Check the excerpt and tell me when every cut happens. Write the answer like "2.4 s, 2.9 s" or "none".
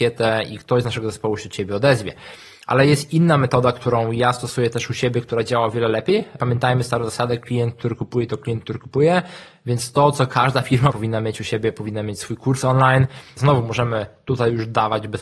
10.9 s, 13.4 s